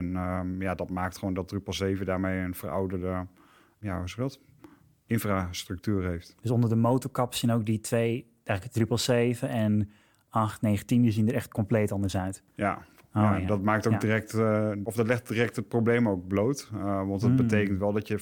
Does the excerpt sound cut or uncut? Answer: uncut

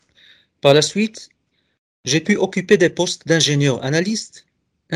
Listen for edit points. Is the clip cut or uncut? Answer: uncut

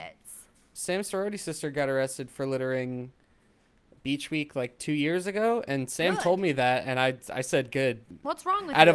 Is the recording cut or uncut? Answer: uncut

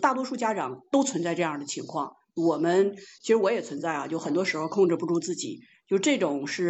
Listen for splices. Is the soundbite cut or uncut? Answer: uncut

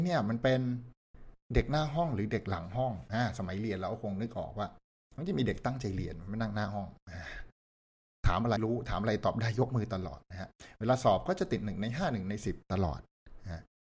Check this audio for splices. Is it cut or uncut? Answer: cut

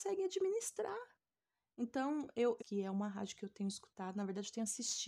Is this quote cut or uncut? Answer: cut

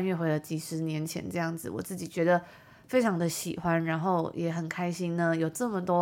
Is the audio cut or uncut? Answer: uncut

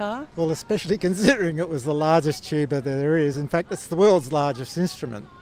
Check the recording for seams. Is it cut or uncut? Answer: uncut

